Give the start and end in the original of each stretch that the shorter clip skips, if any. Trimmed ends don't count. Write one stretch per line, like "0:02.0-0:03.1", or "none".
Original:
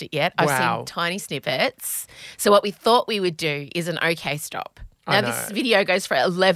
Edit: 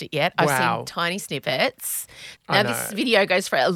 0:02.4-0:04.9

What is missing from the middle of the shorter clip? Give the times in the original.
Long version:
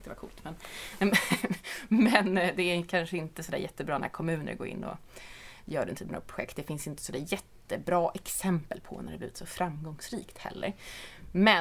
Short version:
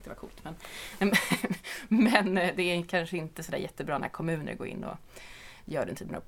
none

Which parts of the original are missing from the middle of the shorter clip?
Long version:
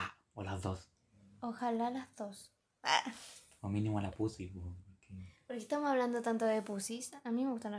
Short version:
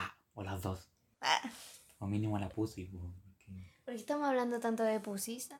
0:01.1-0:02.8

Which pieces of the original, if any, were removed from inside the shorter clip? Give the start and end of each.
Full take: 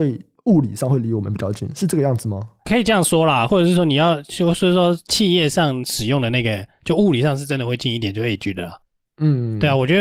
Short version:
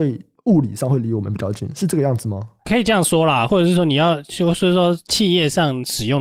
none

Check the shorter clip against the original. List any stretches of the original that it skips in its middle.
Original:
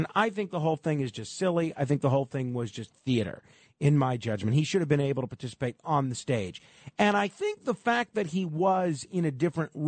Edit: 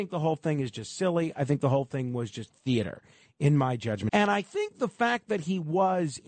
0:04.5-0:06.9

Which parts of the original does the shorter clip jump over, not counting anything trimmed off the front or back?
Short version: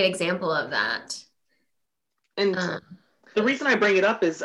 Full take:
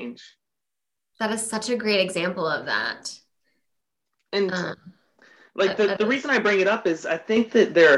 0:05.3-0:06.0

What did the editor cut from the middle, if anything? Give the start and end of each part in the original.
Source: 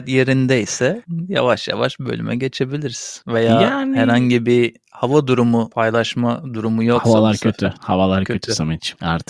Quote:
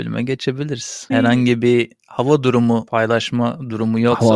0:03.2-0:03.9

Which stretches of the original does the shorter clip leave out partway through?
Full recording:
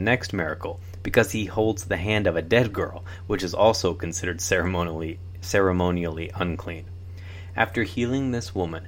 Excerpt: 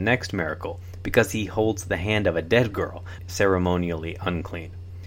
0:03.2-0:05.3

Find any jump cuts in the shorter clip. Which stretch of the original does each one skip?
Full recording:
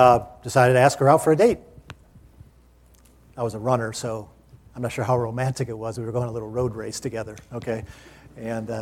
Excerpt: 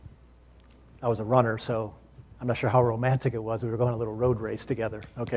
none

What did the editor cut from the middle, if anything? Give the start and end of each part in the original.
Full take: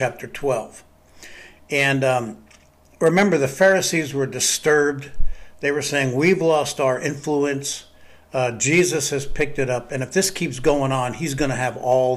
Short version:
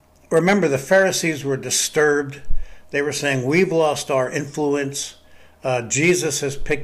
none

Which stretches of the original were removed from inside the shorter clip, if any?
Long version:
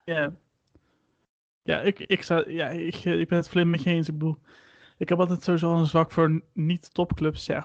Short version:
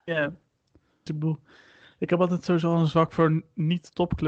0:01.1-0:04.1

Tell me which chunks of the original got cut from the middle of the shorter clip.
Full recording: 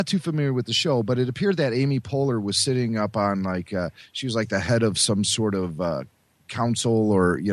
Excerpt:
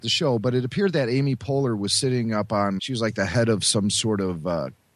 0:03.4-0:04.1

